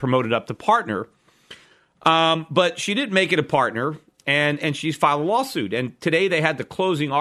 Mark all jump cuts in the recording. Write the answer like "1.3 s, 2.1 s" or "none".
none